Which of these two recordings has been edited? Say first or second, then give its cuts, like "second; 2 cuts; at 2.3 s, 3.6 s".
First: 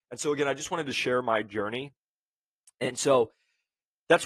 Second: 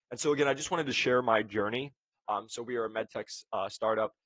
second; 1 cut; at 2.1 s